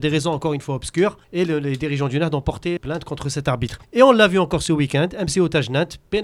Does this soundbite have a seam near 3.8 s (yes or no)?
yes